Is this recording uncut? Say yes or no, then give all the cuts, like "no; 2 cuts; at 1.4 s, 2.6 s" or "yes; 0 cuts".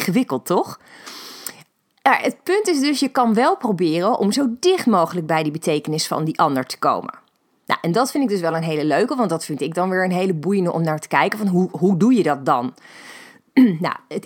yes; 0 cuts